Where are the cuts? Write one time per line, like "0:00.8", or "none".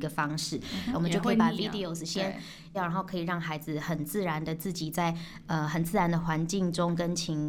0:00.9
0:02.7